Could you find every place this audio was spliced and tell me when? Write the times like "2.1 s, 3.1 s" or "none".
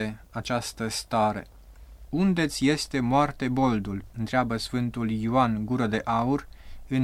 2.1 s, 4.1 s